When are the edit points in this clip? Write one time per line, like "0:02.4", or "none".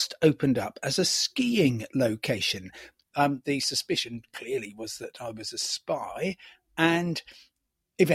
0:03.0